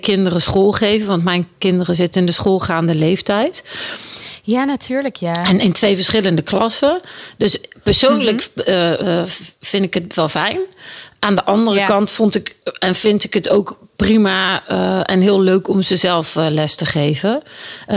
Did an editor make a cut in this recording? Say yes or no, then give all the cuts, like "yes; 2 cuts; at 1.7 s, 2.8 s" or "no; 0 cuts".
no; 0 cuts